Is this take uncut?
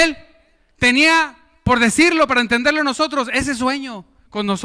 yes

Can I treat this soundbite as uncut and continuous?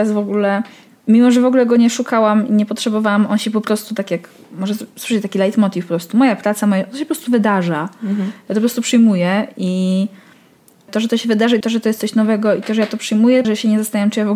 no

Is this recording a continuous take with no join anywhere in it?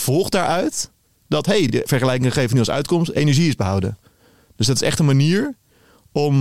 yes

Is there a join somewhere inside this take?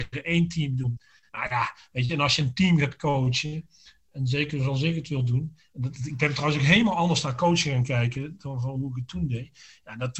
no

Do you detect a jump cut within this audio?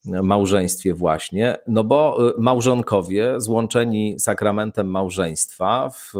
yes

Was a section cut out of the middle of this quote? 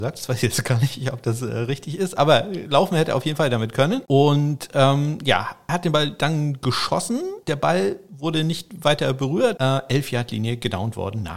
yes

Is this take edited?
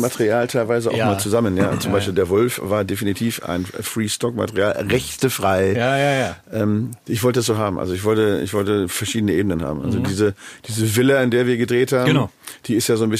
yes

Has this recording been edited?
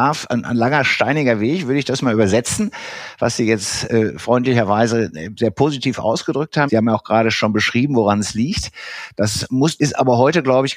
yes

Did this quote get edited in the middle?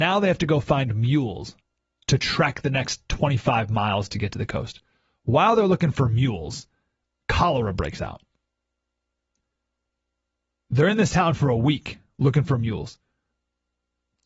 no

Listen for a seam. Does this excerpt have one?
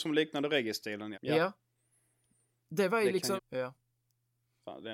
yes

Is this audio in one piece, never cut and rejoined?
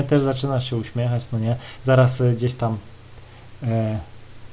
yes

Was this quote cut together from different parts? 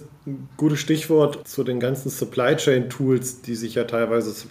yes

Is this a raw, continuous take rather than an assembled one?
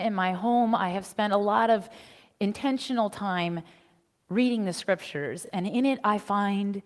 yes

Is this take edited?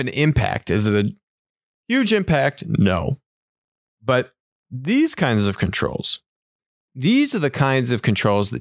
no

